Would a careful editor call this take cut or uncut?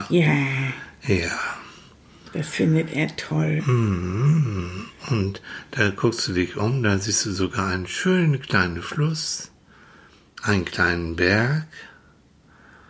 uncut